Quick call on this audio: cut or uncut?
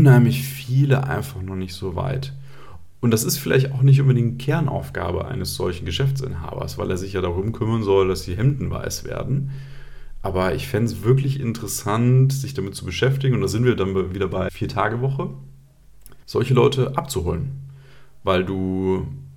cut